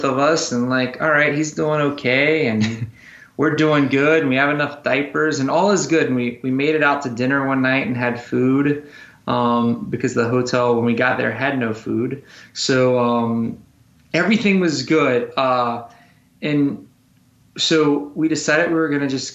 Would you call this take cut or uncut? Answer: uncut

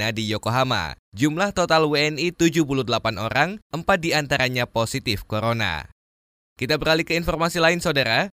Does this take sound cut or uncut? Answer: uncut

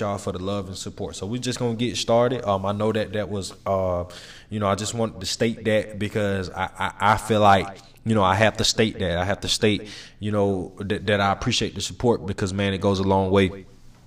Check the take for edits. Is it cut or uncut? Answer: uncut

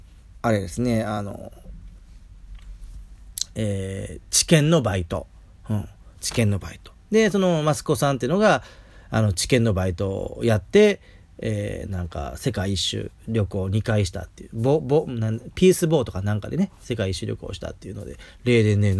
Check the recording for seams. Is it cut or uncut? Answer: uncut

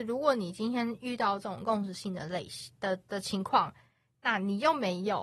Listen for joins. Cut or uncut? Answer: uncut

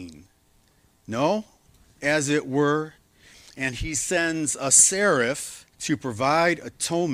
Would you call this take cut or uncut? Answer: cut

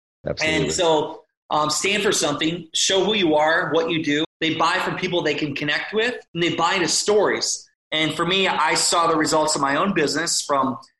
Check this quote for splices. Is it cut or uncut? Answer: cut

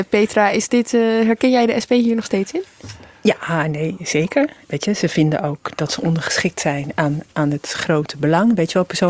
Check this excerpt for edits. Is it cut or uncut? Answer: uncut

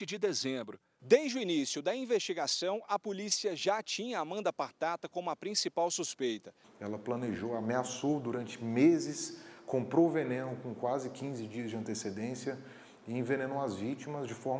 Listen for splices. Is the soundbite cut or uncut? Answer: cut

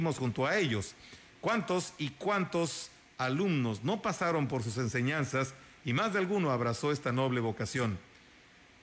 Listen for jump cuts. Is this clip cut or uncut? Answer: uncut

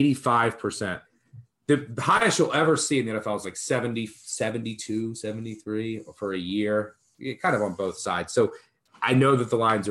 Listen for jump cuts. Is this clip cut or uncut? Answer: uncut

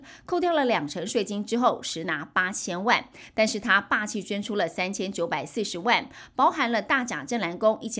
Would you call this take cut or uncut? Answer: uncut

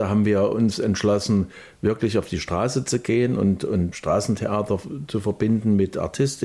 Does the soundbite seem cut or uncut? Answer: cut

